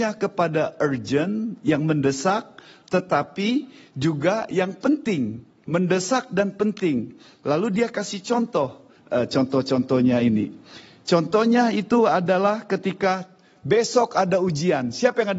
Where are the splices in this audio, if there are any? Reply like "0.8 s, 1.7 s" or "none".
9.0 s